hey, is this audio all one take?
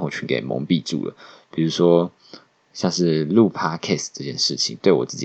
no; 1 cut; at 2.6 s

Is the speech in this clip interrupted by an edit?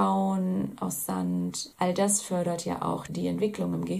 yes; 2 cuts; at 1.7 s, 3.1 s

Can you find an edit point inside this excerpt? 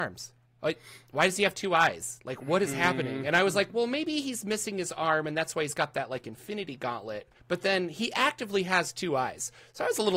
yes; 1 cut; at 7.4 s

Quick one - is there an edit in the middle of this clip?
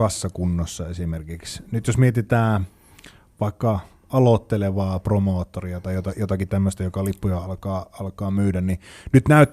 no; 0 cuts

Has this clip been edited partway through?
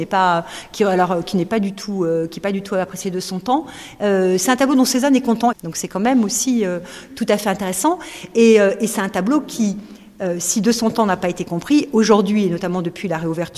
yes; 1 cut; at 5.5 s

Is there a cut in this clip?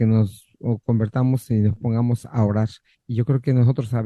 yes; 1 cut; at 2.9 s

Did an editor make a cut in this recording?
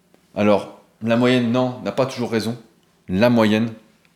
no; 0 cuts

